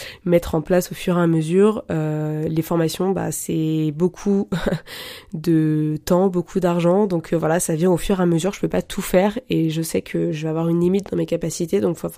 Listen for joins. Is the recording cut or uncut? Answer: uncut